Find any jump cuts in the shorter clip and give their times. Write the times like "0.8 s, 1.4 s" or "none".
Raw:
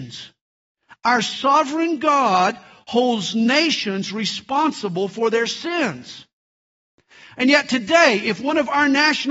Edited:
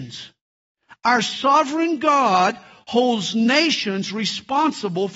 none